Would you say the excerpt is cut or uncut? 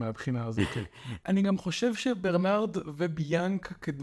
uncut